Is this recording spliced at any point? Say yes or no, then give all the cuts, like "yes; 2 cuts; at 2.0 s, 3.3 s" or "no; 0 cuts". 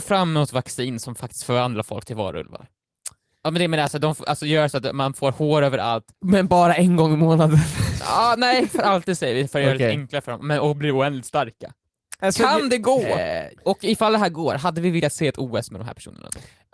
no; 0 cuts